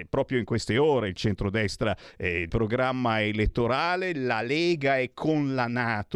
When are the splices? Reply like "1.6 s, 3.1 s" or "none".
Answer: 2.5 s

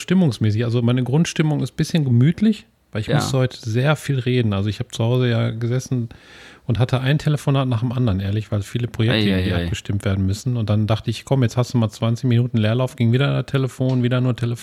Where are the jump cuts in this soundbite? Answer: none

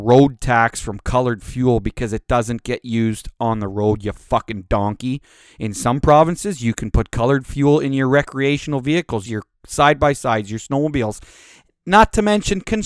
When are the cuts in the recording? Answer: 9.3 s

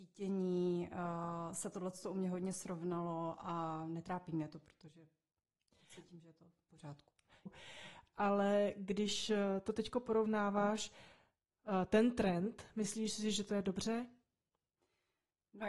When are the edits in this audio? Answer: 7.5 s

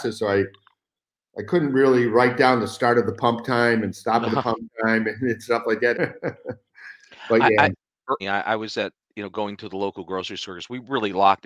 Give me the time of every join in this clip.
5.9 s, 8.2 s

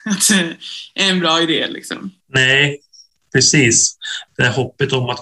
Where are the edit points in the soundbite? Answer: 2.2 s, 4.3 s

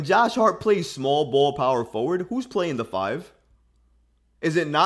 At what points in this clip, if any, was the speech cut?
none

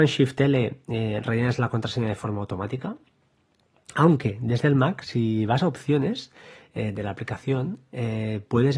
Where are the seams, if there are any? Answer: none

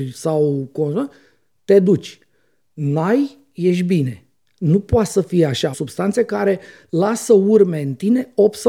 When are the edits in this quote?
5.7 s

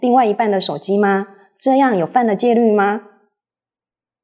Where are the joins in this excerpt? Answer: none

